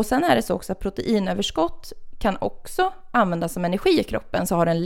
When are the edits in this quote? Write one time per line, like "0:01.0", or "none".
none